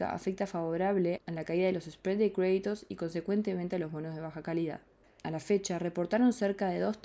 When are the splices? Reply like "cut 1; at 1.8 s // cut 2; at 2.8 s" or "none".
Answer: cut 1; at 5.2 s